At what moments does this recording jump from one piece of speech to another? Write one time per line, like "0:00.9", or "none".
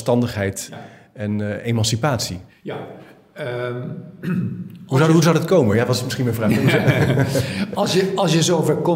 0:02.5